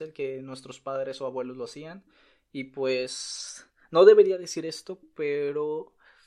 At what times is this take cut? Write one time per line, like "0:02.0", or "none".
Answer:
none